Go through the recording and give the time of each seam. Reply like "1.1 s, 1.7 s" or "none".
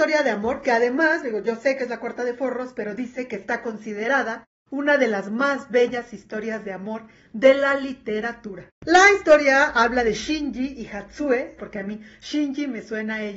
8.7 s, 11.6 s